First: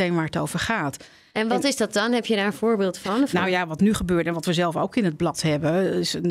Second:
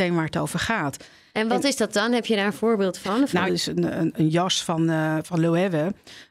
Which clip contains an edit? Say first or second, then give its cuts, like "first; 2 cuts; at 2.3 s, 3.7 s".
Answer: second; 1 cut; at 3.5 s